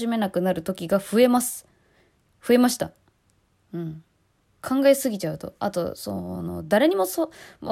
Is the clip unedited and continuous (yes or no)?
yes